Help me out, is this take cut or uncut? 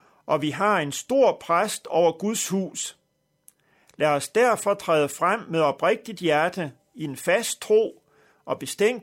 uncut